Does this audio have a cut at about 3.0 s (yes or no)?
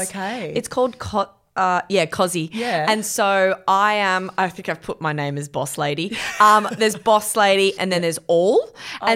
no